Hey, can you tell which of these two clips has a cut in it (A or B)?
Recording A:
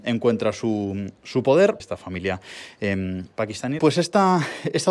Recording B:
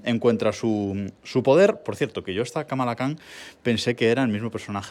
A